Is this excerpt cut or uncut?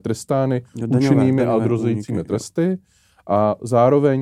uncut